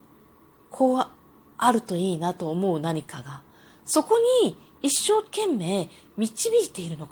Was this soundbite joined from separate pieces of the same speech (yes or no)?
no